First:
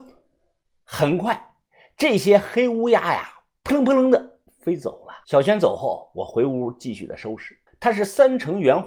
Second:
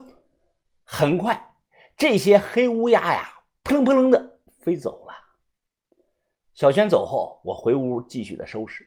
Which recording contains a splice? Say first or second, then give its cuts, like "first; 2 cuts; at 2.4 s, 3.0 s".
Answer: first; 2 cuts; at 5.2 s, 7.7 s